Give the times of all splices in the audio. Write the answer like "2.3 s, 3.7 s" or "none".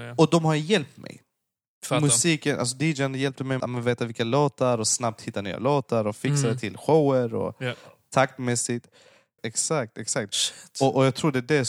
3.6 s, 9.4 s